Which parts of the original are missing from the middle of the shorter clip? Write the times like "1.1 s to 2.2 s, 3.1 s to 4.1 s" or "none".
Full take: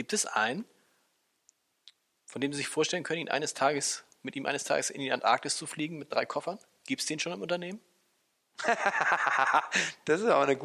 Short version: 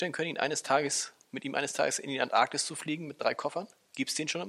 none